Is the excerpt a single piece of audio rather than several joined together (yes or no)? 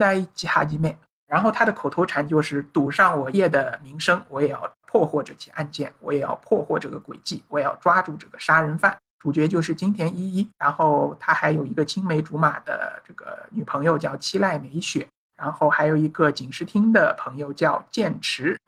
no